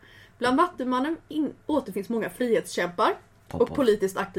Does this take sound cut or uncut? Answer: uncut